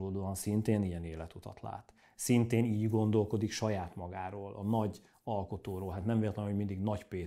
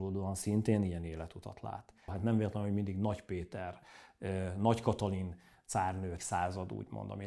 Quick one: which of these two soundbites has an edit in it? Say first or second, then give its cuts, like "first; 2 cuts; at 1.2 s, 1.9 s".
second; 2 cuts; at 2.1 s, 6.2 s